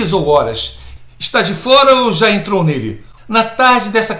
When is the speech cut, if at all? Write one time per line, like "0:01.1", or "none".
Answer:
0:01.1
0:03.2